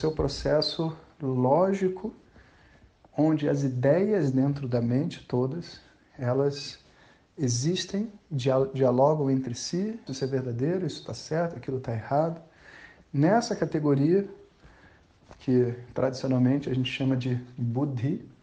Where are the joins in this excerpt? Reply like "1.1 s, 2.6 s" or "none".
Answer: 10.1 s

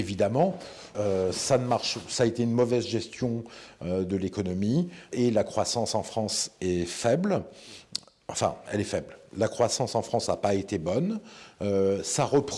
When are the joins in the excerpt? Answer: 0.9 s, 5.1 s

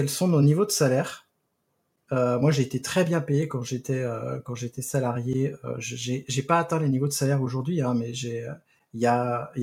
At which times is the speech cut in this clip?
none

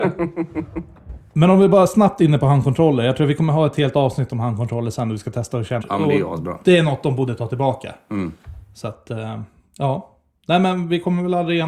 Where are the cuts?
5.8 s

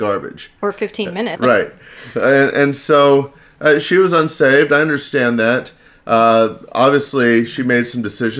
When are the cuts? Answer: 1.3 s

